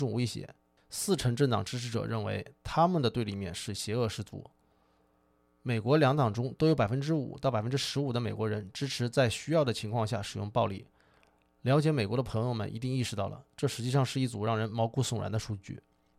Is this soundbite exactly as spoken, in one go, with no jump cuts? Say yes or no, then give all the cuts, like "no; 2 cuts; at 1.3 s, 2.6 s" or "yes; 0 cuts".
yes; 0 cuts